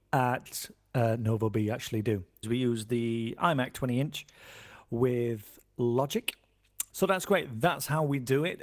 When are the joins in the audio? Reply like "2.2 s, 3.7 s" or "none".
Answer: 2.4 s, 6.9 s